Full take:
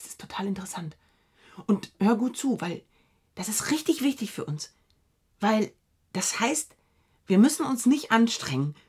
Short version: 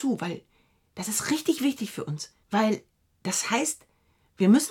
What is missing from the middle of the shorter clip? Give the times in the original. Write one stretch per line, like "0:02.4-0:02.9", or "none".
0:04.8-0:05.3